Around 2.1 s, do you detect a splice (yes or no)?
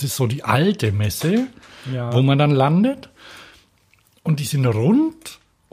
no